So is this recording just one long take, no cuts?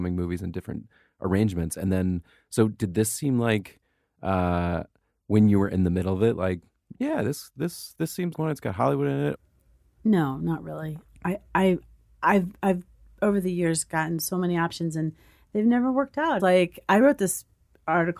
no; 2 cuts; at 8.3 s, 16.4 s

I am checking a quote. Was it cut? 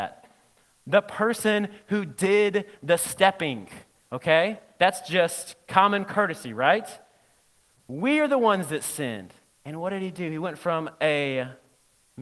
yes; 2 cuts; at 7.8 s, 9.5 s

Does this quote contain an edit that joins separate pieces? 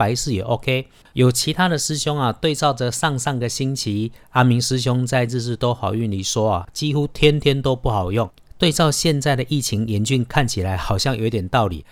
yes; 1 cut; at 8.5 s

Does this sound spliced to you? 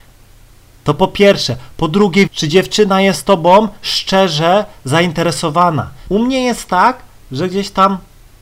yes; 2 cuts; at 2.3 s, 6.1 s

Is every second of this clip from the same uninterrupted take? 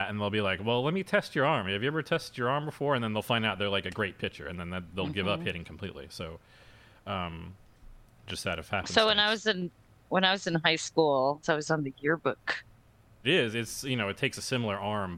no; 2 cuts; at 11.4 s, 13.2 s

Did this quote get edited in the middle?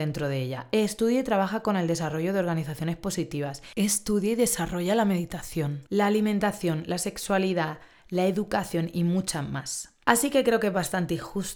no; 0 cuts

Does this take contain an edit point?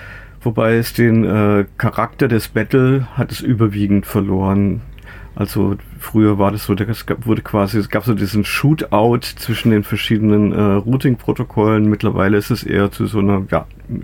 no; 0 cuts

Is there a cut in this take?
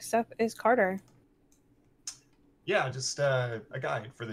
no; 0 cuts

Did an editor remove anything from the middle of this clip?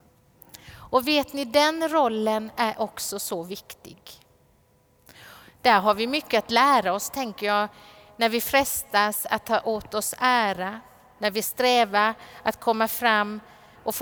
no; 0 cuts

